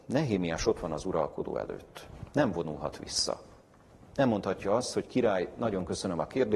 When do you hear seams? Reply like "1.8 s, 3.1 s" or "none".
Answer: none